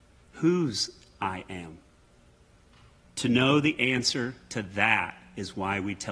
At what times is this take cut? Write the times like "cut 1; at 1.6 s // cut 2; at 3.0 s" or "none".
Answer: cut 1; at 3.0 s

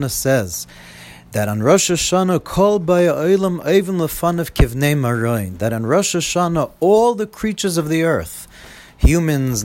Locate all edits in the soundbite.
none

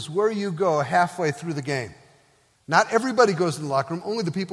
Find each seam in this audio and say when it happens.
cut 1; at 2.5 s

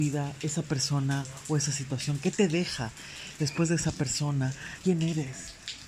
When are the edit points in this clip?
cut 1; at 3.4 s // cut 2; at 4.8 s

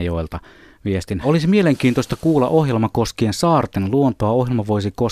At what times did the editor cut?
cut 1; at 1.2 s

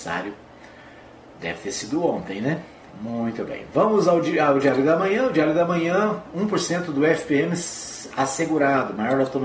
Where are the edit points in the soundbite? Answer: cut 1; at 2.9 s

